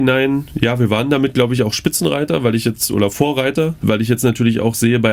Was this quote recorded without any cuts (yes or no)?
yes